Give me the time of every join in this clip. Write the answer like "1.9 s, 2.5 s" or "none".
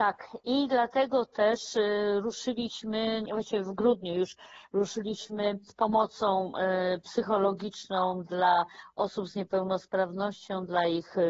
3.3 s